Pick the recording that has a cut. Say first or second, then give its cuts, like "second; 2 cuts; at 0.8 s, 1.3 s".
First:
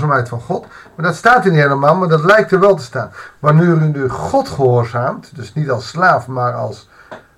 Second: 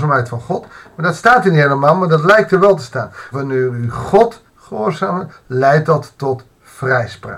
second; 2 cuts; at 3.3 s, 4.5 s